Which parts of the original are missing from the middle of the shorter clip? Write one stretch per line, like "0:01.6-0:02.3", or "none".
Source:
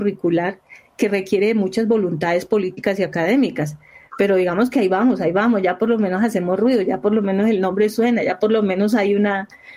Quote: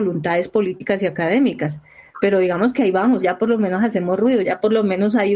0:05.2-0:05.6
0:06.8-0:08.2